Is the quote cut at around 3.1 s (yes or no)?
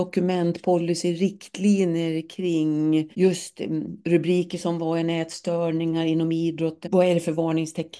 yes